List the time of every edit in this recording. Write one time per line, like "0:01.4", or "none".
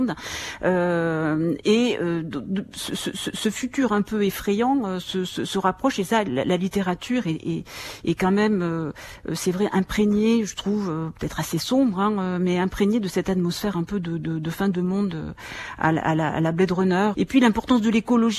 0:17.1